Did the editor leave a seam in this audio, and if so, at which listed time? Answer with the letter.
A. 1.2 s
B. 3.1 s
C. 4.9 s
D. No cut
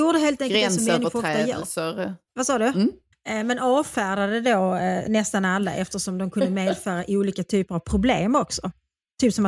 B